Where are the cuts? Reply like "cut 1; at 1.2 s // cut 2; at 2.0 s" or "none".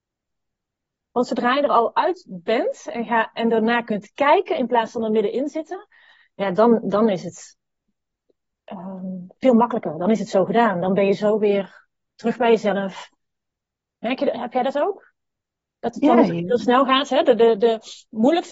none